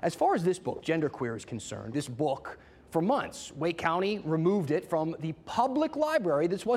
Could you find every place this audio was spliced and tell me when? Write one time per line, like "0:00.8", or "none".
0:01.9

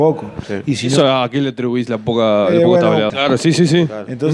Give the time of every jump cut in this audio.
0:03.1

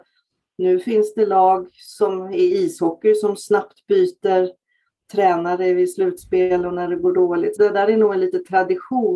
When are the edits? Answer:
0:07.6

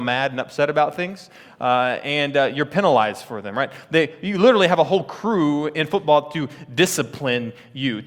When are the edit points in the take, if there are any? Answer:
none

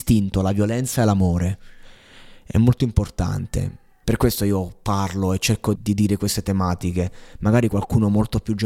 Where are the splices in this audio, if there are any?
0:04.0
0:05.8

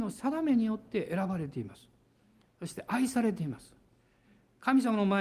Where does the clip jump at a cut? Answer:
none

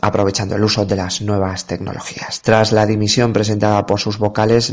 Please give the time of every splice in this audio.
0:02.4

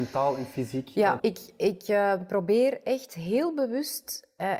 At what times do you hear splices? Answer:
0:01.2

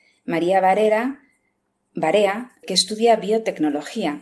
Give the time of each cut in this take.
0:02.6

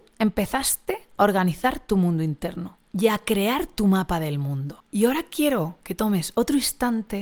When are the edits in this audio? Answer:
none

